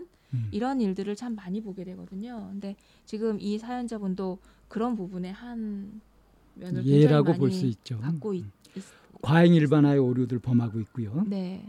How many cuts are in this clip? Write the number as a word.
zero